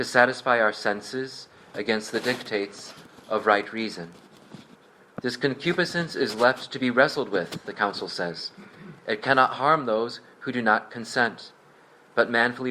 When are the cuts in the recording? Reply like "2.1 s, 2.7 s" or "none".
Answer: none